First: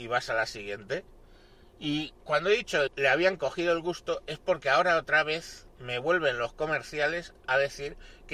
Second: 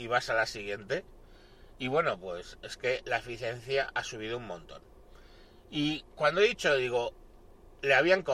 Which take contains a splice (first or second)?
first